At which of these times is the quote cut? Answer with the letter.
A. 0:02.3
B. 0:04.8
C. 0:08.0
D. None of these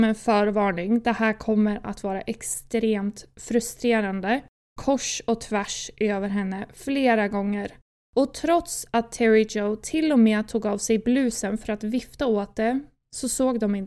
B